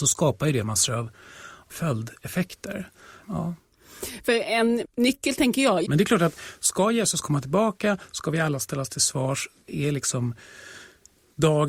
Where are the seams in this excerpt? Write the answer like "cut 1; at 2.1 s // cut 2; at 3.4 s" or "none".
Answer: cut 1; at 3.2 s // cut 2; at 5.8 s